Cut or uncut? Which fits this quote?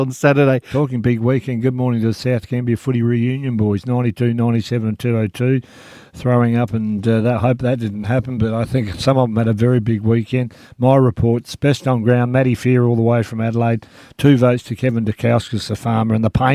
uncut